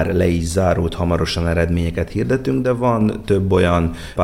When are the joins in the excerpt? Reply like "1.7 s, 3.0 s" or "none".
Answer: none